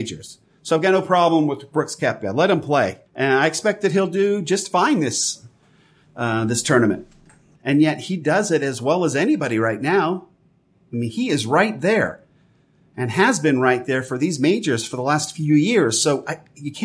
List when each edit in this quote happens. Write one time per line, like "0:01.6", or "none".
0:03.1
0:07.6